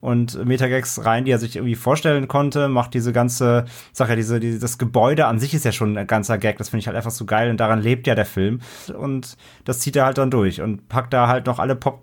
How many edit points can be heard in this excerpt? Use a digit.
1